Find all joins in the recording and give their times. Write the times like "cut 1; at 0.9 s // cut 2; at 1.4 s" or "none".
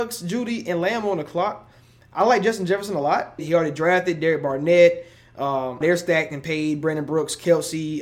cut 1; at 3.4 s // cut 2; at 5.8 s

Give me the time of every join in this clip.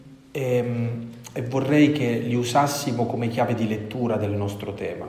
none

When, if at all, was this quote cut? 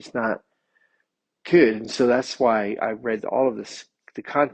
none

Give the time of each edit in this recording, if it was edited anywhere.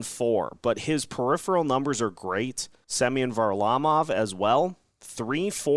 cut 1; at 2.8 s

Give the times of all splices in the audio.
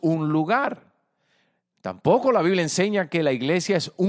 none

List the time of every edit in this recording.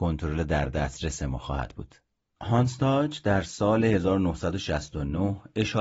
cut 1; at 2.4 s

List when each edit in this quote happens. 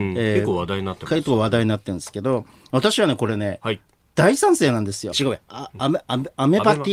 cut 1; at 5.1 s

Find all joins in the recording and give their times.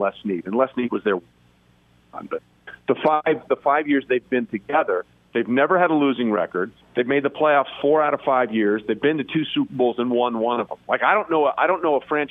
none

